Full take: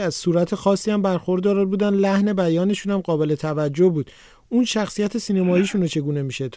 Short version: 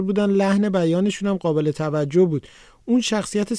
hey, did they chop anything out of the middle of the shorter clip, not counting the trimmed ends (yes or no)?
no